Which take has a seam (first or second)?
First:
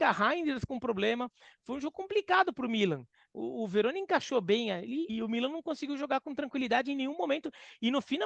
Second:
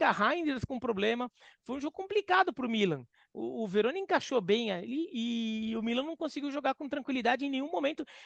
first